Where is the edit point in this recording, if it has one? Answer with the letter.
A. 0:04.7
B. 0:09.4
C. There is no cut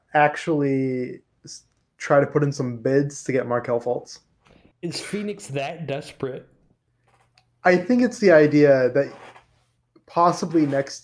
A